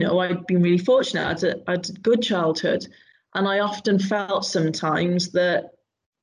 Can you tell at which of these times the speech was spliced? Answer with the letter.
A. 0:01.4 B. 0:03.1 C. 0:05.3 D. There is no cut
D